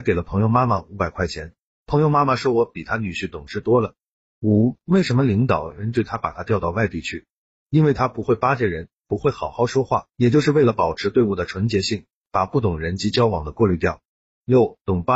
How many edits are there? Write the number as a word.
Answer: zero